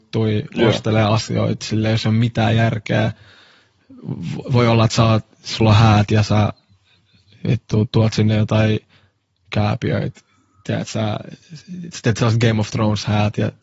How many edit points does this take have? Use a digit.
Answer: 0